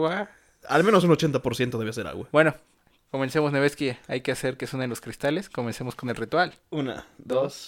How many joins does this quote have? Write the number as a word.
one